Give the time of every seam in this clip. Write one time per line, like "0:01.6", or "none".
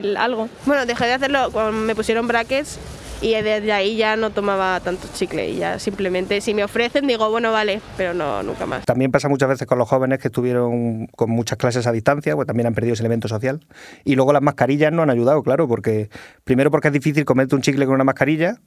0:08.8